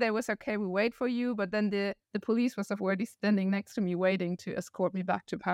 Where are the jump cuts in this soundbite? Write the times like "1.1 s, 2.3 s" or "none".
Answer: none